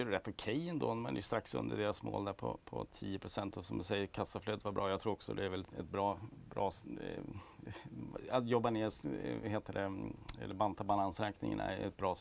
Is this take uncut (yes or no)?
yes